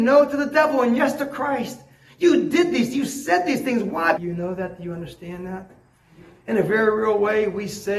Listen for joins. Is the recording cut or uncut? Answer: cut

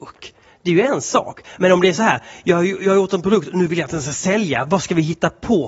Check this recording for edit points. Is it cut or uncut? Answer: uncut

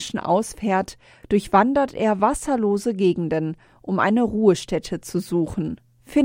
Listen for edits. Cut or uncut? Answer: uncut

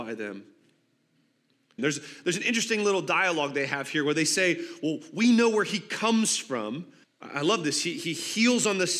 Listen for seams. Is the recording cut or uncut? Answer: cut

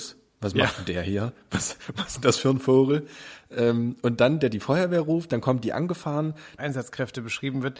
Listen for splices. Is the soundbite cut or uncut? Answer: cut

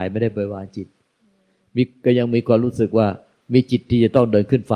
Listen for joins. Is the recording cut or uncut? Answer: uncut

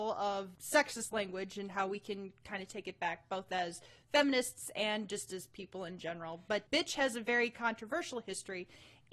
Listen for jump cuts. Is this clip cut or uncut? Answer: uncut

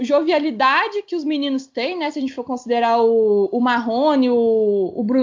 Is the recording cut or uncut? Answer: uncut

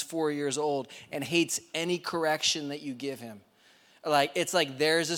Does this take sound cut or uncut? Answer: uncut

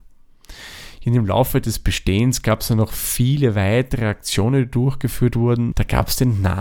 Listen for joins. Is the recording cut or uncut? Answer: cut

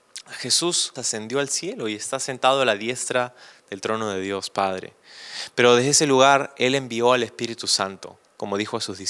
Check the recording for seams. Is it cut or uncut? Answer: cut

